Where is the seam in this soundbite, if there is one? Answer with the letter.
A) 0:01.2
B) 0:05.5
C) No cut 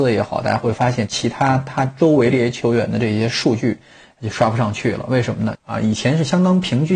B